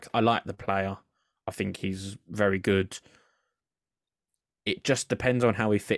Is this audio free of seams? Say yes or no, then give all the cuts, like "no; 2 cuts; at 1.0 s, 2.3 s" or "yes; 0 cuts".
yes; 0 cuts